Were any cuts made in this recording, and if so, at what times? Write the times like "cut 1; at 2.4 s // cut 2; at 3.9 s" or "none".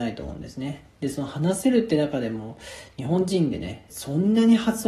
cut 1; at 3.9 s